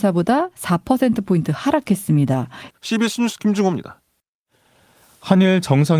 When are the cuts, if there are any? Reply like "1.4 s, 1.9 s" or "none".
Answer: 2.7 s